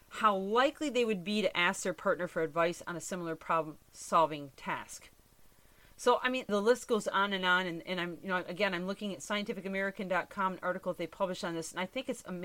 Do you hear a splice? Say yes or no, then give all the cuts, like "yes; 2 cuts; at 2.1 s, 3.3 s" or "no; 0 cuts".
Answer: yes; 1 cut; at 6.5 s